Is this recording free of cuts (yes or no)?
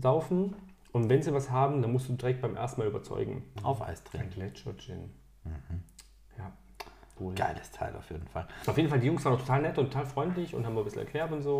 no